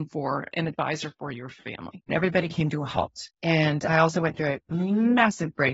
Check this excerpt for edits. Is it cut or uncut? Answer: cut